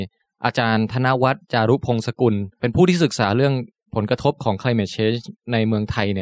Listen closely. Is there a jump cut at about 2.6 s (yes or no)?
yes